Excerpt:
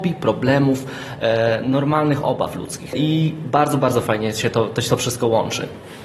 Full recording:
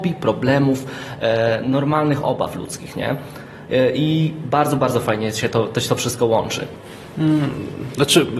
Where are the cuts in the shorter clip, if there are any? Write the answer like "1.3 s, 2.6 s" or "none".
2.9 s